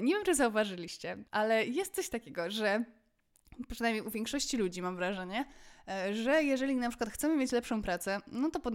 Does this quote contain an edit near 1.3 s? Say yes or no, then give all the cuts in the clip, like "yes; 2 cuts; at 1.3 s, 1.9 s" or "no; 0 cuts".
yes; 1 cut; at 1.3 s